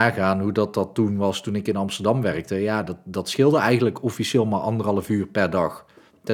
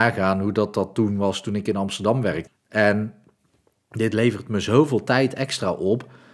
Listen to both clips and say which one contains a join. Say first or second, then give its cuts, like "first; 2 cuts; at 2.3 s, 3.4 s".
second; 1 cut; at 2.5 s